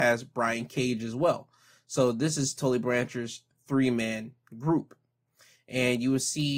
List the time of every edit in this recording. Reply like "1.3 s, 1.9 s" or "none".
none